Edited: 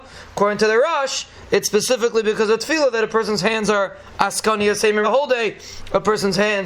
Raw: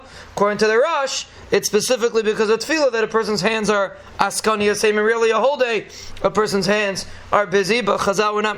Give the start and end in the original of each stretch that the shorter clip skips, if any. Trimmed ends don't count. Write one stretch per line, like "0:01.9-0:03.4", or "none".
0:05.0-0:05.3